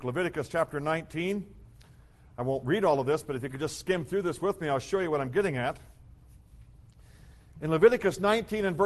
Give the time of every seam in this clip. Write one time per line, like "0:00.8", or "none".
none